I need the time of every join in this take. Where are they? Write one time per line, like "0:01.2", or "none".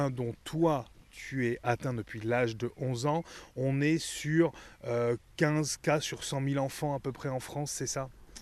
none